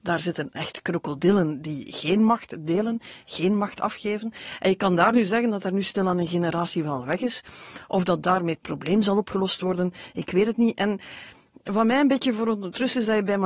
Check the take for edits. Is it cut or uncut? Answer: uncut